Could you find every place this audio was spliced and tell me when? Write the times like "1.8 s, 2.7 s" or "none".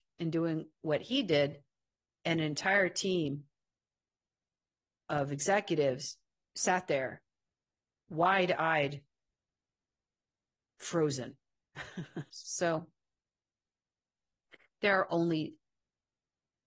12.3 s